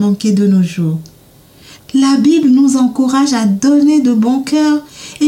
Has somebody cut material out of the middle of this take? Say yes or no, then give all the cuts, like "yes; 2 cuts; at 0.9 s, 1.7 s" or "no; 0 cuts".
yes; 1 cut; at 1.8 s